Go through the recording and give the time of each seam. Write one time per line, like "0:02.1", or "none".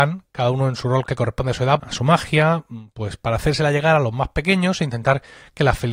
0:01.8